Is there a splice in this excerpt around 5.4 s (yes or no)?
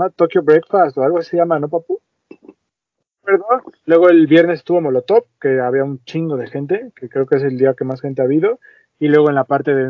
no